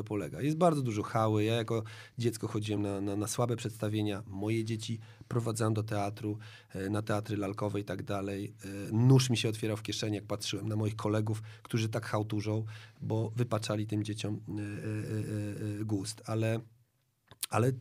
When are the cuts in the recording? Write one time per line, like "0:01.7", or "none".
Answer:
none